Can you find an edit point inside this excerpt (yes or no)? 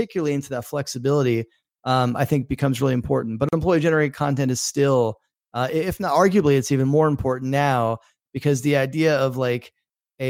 no